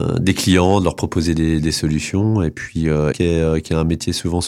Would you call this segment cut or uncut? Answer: cut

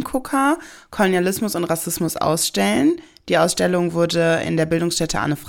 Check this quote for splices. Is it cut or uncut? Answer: uncut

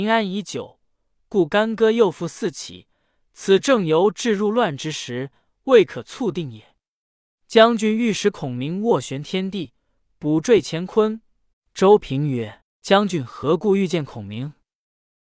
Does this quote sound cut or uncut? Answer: cut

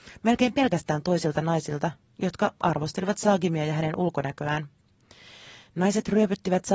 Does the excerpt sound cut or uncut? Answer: uncut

